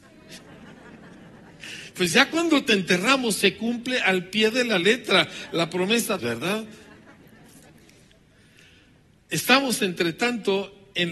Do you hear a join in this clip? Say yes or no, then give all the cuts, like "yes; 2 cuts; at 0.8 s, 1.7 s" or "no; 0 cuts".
yes; 1 cut; at 6.2 s